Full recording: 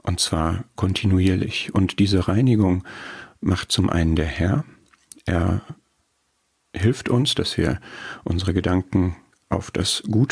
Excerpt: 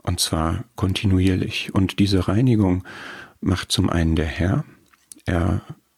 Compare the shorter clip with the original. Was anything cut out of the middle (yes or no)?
no